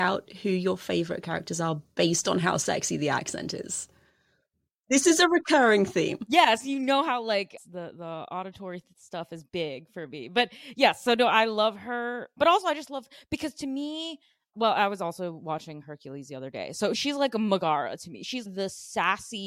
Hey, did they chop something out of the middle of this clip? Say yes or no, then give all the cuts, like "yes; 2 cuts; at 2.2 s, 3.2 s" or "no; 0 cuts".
no; 0 cuts